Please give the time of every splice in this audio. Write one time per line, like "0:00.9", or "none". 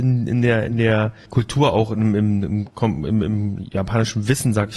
0:01.3